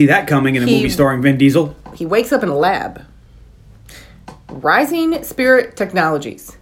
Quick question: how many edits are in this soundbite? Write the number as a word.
zero